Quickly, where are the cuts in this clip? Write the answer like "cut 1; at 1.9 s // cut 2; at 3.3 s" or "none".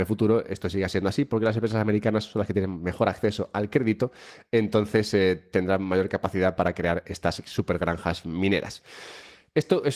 none